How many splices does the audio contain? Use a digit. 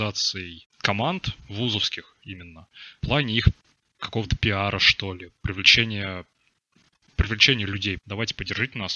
1